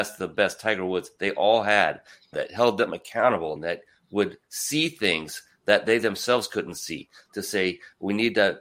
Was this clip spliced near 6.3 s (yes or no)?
no